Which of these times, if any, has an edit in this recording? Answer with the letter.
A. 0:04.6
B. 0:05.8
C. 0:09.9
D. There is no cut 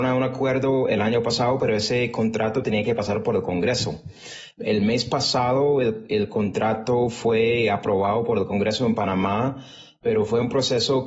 D